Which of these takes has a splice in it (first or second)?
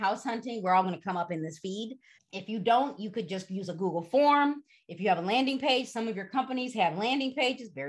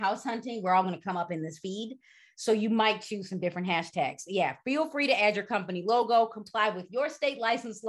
first